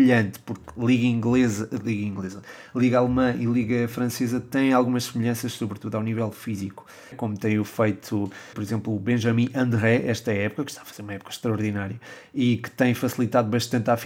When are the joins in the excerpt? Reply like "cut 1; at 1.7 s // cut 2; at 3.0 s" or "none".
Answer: cut 1; at 7.1 s // cut 2; at 8.5 s